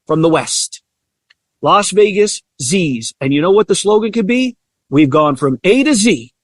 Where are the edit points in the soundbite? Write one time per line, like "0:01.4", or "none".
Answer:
none